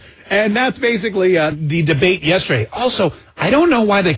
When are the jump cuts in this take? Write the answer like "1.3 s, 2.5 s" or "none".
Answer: 1.5 s